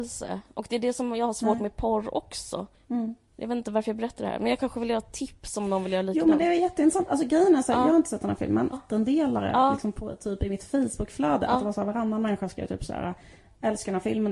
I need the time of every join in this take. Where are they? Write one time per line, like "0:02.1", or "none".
0:08.7